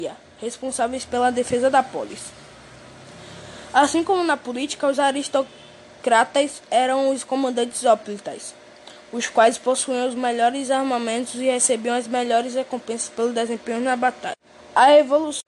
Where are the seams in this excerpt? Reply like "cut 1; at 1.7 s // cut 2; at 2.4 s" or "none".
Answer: none